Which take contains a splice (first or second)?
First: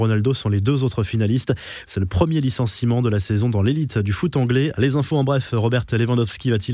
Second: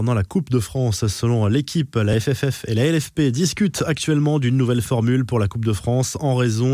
first